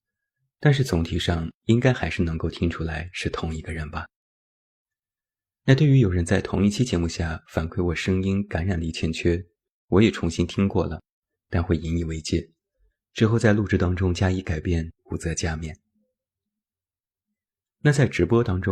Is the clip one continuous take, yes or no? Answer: no